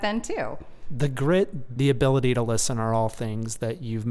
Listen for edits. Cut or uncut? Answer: cut